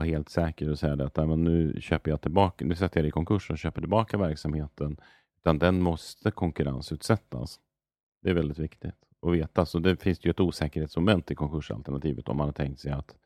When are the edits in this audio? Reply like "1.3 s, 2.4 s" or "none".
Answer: none